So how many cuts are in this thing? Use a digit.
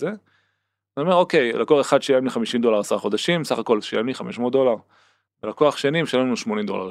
1